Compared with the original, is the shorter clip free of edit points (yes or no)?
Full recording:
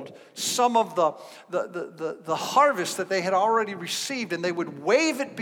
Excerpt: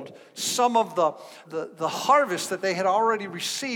no